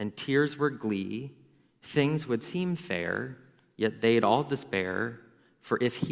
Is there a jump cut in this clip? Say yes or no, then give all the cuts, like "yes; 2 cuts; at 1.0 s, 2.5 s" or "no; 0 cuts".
no; 0 cuts